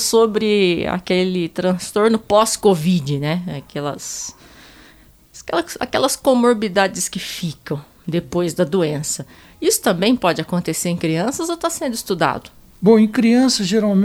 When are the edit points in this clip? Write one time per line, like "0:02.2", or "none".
none